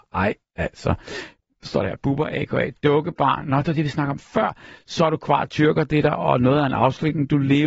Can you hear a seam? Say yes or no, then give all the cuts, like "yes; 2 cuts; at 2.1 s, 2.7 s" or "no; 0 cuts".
no; 0 cuts